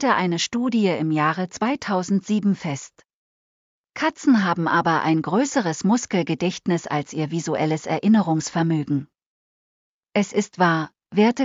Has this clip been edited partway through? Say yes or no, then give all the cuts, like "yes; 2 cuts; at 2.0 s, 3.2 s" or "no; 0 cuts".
yes; 1 cut; at 9.9 s